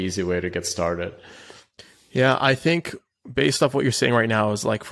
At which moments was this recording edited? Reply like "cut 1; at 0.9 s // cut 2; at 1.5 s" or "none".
none